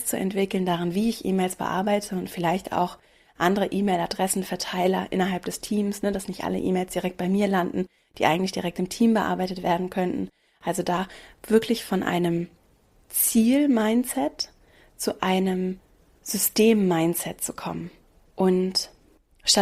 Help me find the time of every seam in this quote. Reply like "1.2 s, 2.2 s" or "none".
none